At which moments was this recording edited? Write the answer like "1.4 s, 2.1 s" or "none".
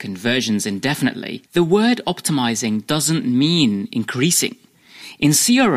1.5 s